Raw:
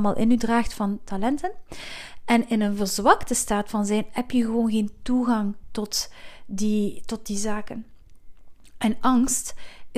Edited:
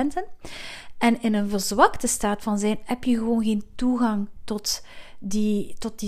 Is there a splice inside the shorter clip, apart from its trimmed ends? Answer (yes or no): no